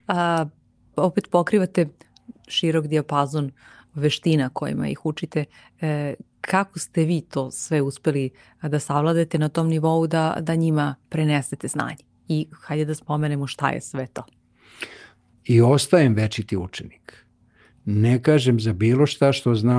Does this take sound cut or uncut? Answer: cut